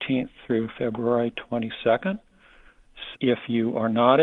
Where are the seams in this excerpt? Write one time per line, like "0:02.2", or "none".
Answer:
0:03.1